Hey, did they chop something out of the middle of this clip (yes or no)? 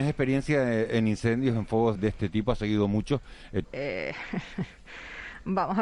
yes